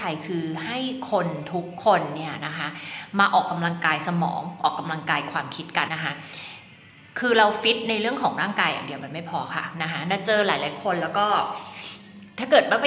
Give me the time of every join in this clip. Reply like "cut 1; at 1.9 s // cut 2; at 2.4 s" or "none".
cut 1; at 5.9 s